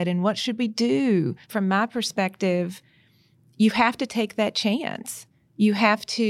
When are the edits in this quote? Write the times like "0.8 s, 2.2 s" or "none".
1.4 s